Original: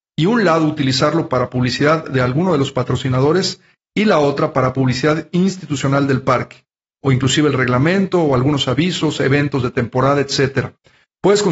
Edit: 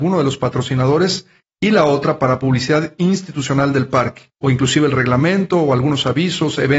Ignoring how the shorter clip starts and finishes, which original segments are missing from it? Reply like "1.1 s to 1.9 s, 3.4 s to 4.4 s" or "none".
6.7 s to 7.0 s